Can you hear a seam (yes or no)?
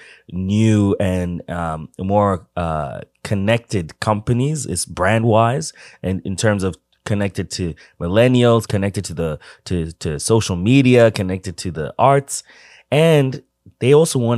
no